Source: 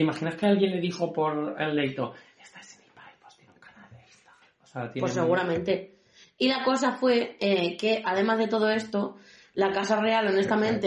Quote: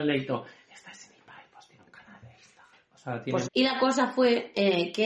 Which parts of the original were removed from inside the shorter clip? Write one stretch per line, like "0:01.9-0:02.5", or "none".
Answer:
0:05.1-0:06.3